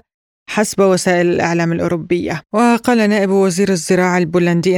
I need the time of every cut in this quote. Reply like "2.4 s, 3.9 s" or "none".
2.5 s

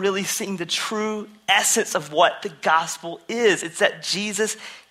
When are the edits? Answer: none

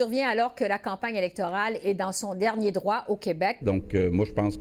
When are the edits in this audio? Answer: 3.6 s

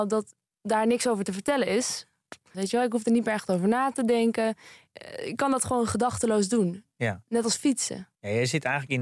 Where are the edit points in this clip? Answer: 2.5 s

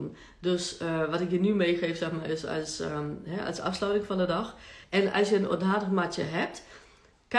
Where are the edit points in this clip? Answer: 4.8 s

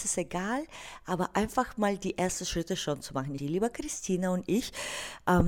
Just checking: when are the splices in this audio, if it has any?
3.4 s

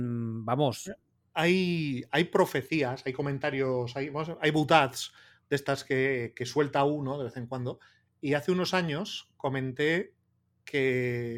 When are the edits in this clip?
none

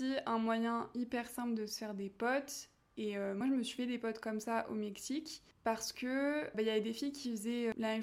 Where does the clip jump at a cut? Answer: none

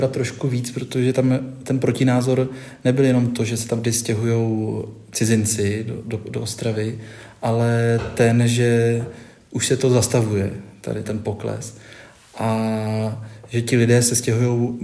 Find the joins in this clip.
11.0 s

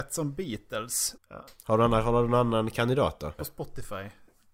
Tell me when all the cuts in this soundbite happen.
1.2 s, 3.4 s

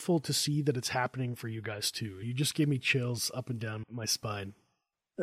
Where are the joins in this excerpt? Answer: 2.2 s, 3.8 s

